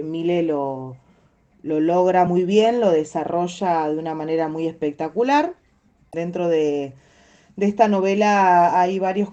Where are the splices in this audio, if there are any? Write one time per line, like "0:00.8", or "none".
none